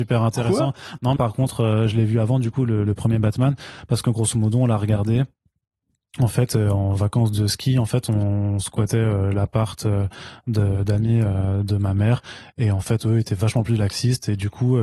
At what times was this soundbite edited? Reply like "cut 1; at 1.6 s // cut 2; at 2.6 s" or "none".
cut 1; at 1.2 s